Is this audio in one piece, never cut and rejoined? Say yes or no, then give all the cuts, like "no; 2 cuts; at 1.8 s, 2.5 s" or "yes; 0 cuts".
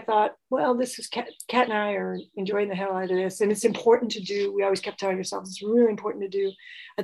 yes; 0 cuts